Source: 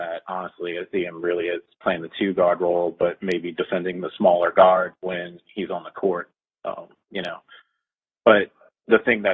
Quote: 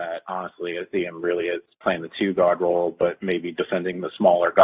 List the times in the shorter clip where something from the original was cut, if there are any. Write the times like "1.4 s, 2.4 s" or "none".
none